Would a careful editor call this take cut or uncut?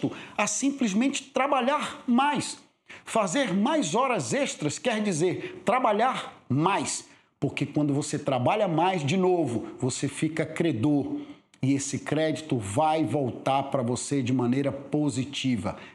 uncut